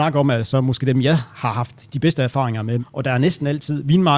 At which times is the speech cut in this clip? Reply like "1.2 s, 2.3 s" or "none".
2.8 s